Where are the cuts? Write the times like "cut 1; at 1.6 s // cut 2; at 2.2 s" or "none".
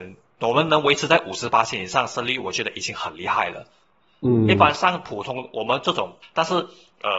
cut 1; at 6.2 s